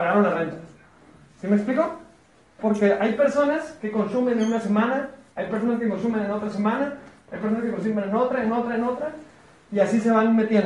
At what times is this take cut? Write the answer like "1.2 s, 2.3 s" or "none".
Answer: 2.6 s